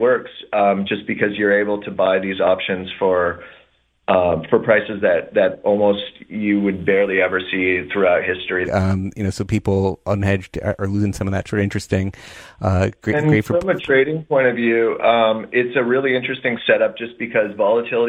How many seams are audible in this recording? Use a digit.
1